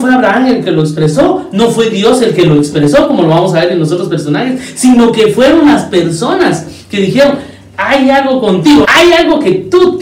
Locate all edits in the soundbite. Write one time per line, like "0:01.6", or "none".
0:08.8